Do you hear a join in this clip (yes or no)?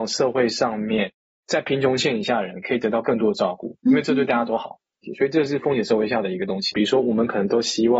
yes